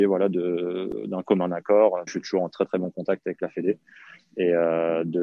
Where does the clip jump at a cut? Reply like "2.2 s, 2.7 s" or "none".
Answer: 2.1 s